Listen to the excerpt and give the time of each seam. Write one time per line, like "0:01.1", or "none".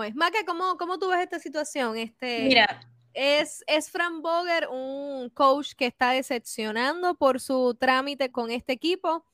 0:08.3

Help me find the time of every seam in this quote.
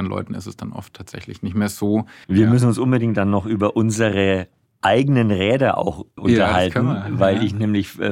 0:02.2
0:06.2

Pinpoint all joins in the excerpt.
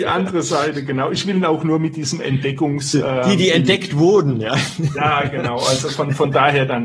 none

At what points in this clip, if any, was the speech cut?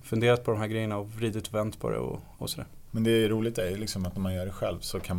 0:02.4

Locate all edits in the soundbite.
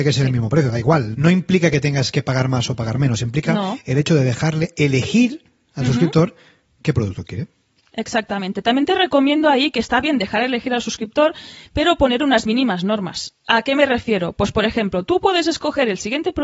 0:01.1

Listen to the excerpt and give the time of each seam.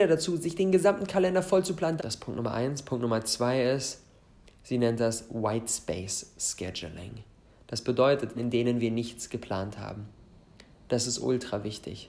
0:02.0
0:08.3

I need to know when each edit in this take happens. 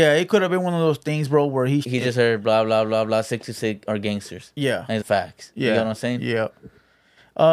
0:01.8
0:05.0

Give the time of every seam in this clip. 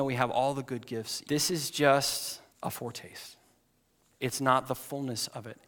0:01.2
0:02.5

